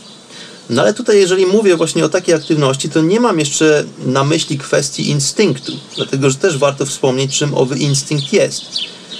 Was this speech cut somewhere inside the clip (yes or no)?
no